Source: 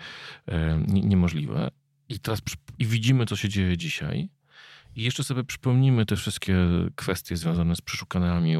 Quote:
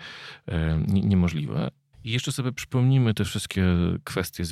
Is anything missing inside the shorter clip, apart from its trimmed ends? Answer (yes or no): yes